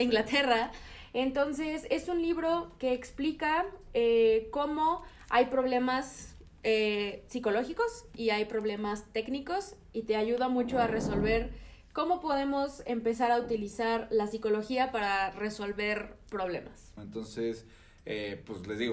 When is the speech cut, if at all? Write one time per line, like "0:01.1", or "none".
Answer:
0:17.0